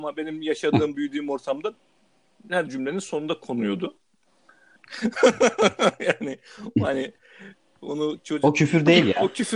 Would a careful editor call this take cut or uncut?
cut